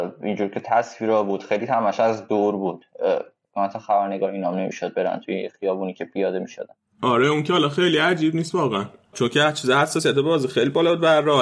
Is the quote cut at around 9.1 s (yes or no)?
yes